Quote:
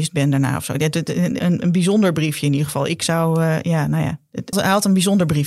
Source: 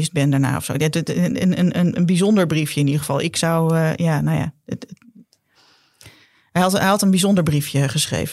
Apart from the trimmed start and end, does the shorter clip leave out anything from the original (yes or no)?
yes